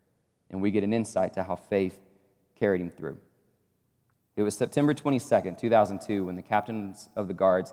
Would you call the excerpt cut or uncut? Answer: cut